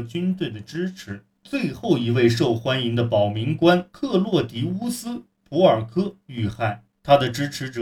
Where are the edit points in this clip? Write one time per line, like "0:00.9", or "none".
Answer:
0:01.3

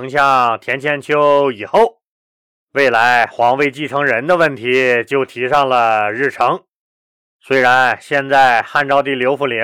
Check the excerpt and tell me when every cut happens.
none

